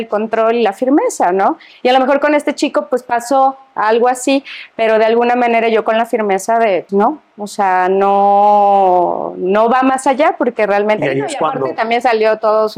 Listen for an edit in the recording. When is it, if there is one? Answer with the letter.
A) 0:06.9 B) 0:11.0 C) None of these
A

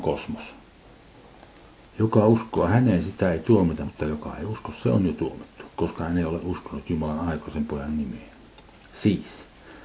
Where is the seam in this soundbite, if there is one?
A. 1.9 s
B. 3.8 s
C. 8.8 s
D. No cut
A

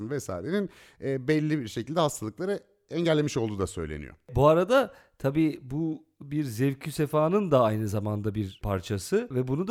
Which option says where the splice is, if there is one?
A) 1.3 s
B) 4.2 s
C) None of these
C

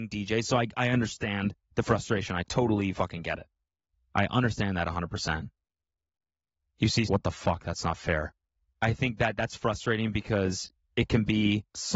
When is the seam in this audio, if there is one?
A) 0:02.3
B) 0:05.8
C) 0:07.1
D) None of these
C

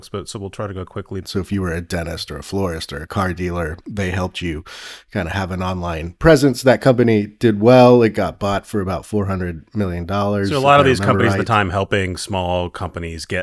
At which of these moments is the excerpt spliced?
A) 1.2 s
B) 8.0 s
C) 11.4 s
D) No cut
A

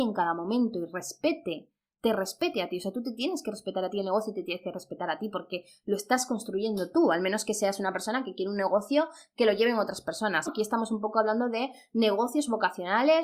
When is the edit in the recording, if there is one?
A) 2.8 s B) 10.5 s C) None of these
B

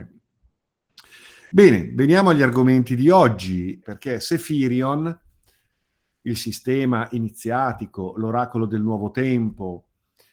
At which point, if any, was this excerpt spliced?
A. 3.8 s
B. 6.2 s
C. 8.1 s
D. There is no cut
A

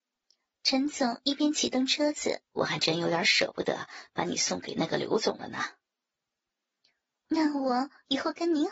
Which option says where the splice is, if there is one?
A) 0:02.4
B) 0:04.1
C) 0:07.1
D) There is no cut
A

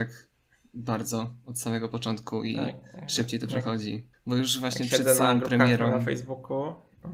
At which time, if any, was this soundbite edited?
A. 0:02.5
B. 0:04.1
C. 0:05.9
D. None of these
B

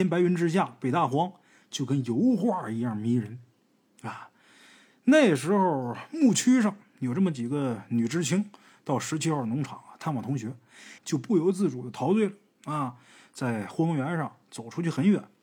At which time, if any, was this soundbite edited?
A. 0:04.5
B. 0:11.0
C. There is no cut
B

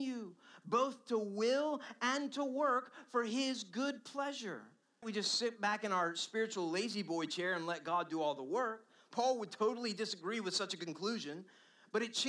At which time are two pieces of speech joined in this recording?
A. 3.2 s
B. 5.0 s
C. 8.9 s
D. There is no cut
B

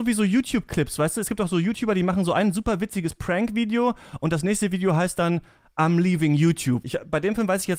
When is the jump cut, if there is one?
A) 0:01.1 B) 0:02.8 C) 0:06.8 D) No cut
C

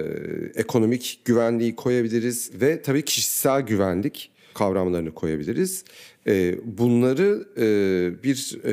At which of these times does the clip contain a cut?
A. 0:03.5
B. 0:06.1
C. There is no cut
C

